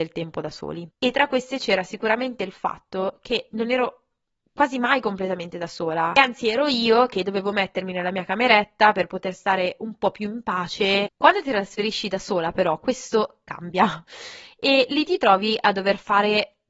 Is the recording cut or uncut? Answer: cut